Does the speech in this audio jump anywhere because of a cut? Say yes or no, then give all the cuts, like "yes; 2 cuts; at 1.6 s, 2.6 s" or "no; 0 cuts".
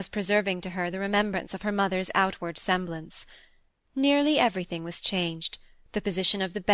yes; 1 cut; at 3.9 s